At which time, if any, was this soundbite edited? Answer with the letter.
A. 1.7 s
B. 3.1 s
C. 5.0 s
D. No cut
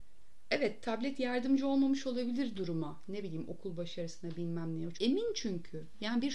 C